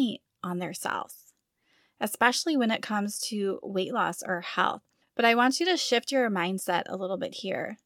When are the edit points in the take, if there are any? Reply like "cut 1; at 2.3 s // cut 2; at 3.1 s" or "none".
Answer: none